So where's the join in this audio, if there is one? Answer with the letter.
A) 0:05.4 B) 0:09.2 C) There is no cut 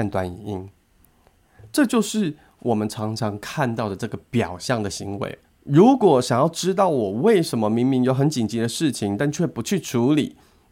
A